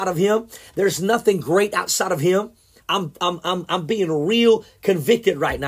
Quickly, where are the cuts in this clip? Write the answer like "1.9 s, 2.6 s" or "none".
2.8 s

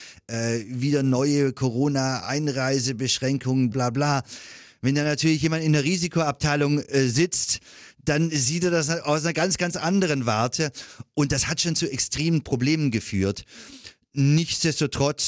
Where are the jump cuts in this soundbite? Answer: 3.7 s

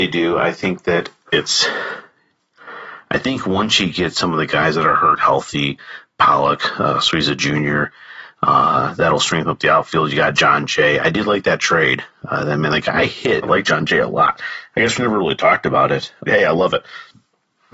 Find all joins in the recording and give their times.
13.4 s, 16.3 s

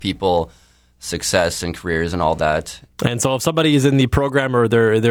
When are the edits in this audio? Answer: 2.9 s

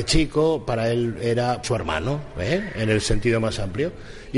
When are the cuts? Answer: 1.6 s

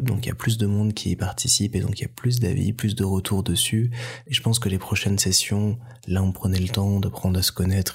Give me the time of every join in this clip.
none

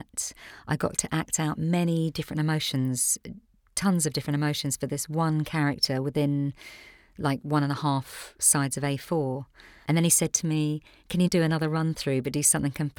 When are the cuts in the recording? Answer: 9.8 s, 11.3 s

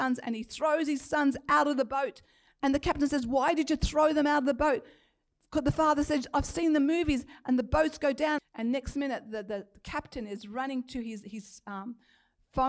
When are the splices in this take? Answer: 8.4 s

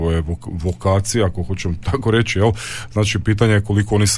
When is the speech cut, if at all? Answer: none

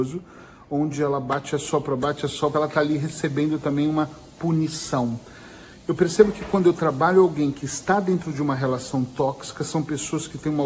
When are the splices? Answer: 2.5 s

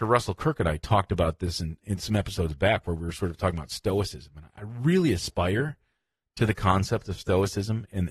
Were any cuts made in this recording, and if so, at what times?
none

